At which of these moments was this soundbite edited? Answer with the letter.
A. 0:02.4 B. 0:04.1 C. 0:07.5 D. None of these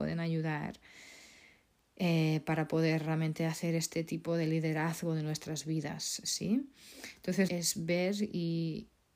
C